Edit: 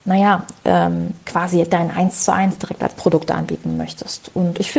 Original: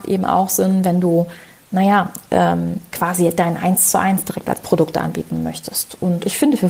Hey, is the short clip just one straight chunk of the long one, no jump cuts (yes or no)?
yes